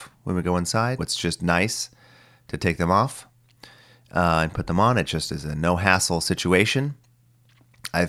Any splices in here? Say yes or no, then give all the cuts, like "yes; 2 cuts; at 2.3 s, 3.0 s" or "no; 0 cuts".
yes; 1 cut; at 1.0 s